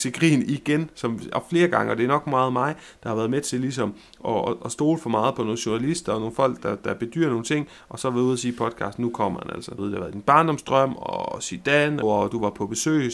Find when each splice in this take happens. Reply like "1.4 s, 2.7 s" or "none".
9.8 s, 12.0 s